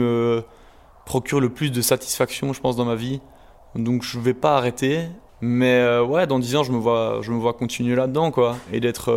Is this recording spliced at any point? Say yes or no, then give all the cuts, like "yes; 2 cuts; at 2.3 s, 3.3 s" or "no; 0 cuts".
yes; 1 cut; at 5.3 s